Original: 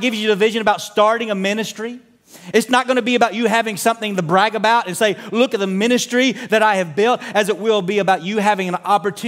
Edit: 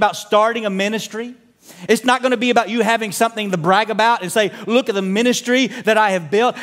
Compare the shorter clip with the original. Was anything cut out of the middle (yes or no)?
no